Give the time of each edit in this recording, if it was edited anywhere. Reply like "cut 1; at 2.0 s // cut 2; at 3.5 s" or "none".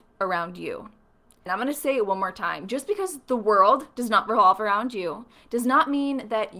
cut 1; at 1.5 s